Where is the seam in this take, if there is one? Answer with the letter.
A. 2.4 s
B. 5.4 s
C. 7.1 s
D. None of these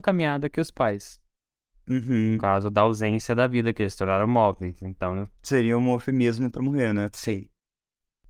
D